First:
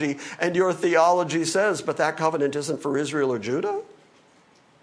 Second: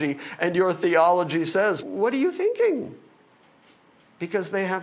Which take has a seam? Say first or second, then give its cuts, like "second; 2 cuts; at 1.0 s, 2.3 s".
second; 1 cut; at 1.8 s